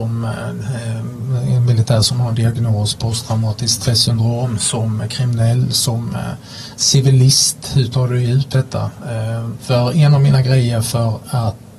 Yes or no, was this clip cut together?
yes